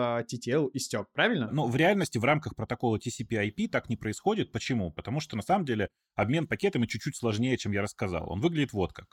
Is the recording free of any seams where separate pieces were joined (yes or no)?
yes